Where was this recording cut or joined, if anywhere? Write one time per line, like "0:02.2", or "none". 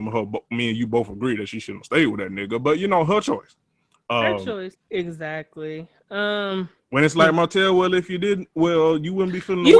0:04.7